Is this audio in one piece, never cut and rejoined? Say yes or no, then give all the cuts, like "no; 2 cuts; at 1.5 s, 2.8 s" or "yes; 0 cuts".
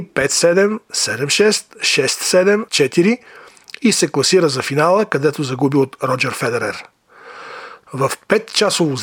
no; 2 cuts; at 2.7 s, 7.9 s